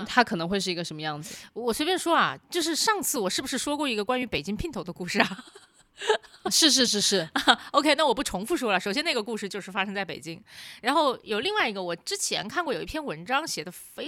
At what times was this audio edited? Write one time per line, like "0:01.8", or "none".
0:06.9